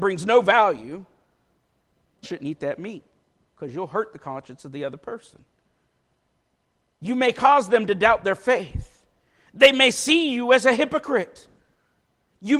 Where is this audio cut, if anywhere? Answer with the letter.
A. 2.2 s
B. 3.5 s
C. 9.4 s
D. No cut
A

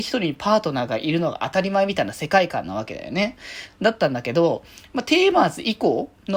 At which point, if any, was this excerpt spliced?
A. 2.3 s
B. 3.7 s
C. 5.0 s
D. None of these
D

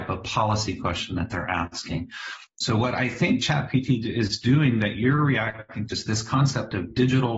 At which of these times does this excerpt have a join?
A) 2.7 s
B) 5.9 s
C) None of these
B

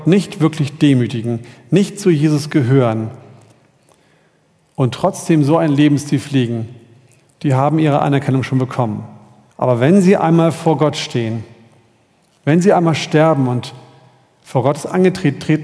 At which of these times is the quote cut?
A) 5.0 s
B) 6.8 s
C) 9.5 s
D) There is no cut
C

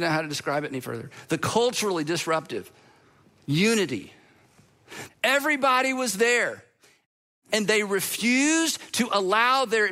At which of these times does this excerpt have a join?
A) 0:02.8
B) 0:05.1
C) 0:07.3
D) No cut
B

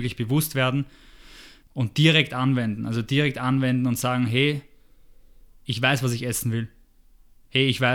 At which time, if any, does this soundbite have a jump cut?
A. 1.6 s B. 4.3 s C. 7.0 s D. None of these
A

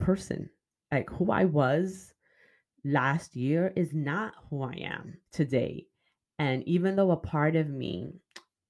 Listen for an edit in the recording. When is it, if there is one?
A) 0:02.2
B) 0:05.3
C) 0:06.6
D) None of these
B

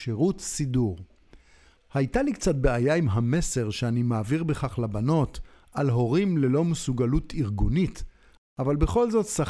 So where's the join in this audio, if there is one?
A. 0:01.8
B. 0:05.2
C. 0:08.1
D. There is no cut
D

